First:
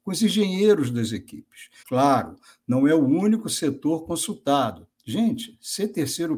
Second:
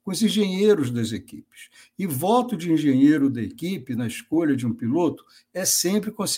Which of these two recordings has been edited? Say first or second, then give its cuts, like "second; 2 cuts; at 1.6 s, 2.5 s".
first; 2 cuts; at 1.8 s, 4.9 s